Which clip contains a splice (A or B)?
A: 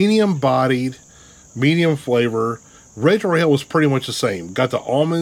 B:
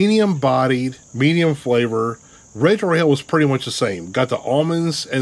B